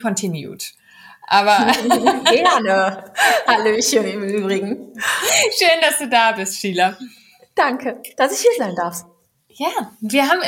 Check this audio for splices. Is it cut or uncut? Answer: uncut